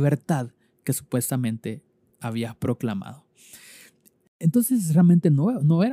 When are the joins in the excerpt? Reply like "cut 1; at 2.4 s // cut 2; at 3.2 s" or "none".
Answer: none